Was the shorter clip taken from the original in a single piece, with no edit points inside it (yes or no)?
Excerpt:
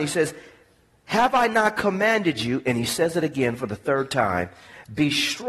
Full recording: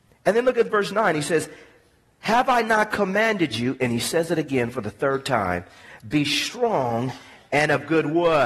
yes